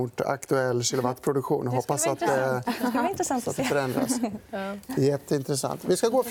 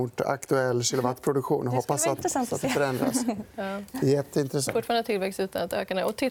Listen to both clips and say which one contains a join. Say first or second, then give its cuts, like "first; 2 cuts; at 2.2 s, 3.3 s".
second; 2 cuts; at 2.2 s, 4.7 s